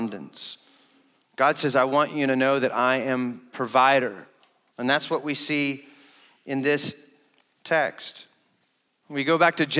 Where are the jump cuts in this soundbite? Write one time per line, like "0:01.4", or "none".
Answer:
0:08.9